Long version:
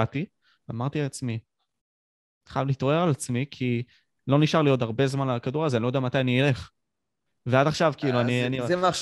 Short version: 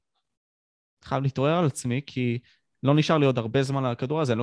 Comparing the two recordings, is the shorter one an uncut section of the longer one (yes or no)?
yes